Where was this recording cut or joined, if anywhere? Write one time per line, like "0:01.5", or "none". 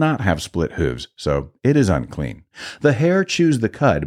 none